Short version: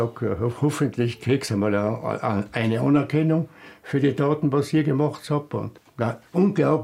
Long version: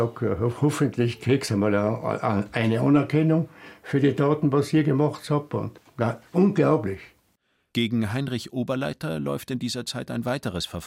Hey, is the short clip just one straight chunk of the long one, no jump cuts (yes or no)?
yes